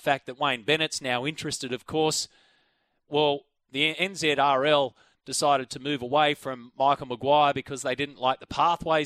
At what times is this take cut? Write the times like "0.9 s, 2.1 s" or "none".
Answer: none